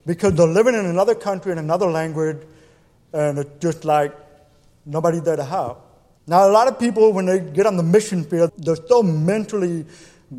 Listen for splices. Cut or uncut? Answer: cut